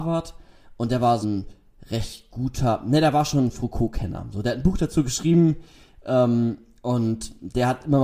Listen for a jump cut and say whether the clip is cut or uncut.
cut